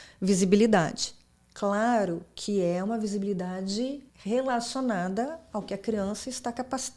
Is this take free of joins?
no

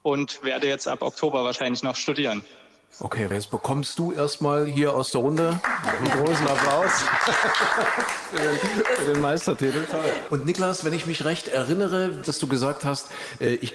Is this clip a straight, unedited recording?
no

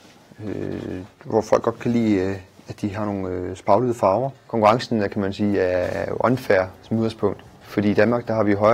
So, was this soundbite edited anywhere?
no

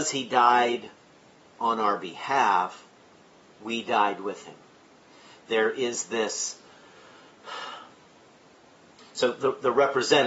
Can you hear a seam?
no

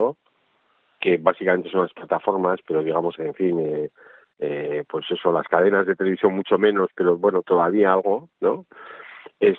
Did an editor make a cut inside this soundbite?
yes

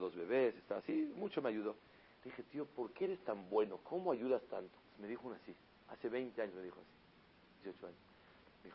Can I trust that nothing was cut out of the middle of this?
no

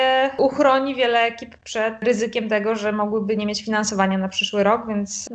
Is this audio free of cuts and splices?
yes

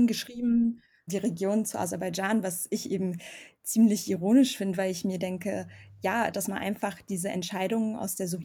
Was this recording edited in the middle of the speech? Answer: yes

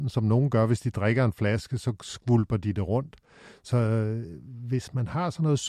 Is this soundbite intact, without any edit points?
yes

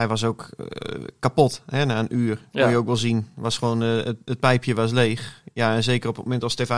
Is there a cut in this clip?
no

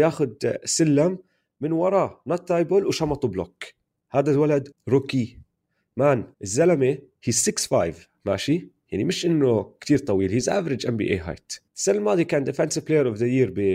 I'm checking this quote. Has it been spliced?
yes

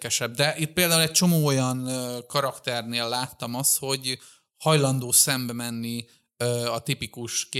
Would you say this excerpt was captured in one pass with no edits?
yes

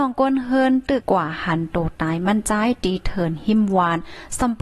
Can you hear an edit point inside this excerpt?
yes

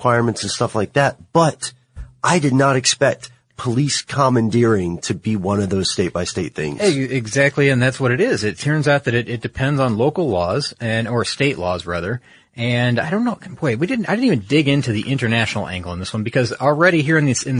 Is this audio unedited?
yes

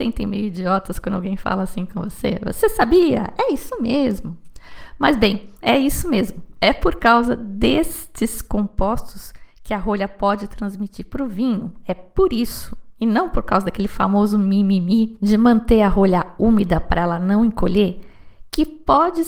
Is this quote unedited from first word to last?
yes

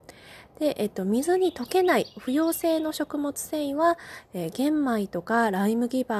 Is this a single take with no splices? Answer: yes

